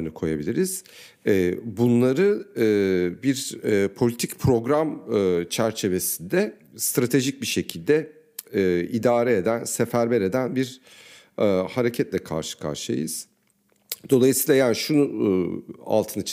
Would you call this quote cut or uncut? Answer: uncut